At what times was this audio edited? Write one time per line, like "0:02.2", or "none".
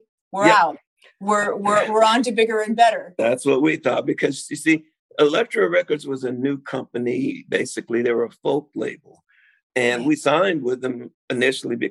none